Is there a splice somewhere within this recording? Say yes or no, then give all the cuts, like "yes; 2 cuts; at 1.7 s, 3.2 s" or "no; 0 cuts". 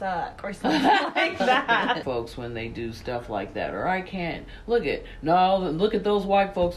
yes; 1 cut; at 2.0 s